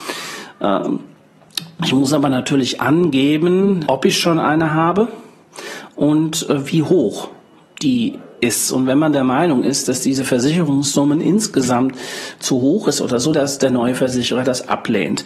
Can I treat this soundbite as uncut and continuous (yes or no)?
no